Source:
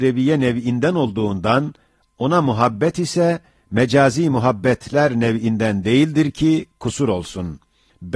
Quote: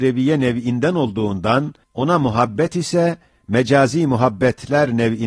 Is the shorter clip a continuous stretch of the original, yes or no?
no